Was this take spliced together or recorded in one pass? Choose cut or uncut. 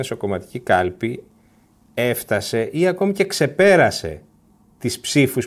uncut